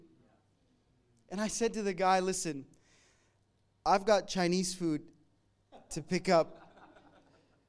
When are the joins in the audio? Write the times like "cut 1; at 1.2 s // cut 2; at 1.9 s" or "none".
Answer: none